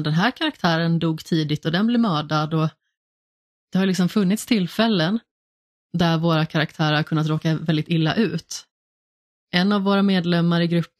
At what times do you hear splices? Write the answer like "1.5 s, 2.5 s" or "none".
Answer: none